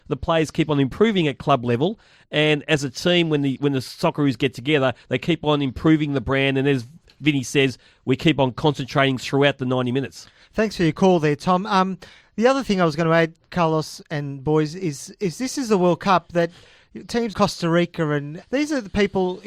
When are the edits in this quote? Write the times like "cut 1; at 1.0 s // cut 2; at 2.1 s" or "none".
cut 1; at 17.3 s // cut 2; at 18.4 s